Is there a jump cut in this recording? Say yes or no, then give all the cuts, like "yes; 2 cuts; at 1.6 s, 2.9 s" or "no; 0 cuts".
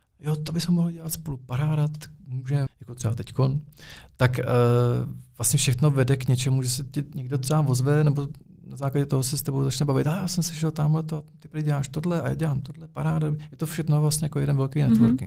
yes; 1 cut; at 2.7 s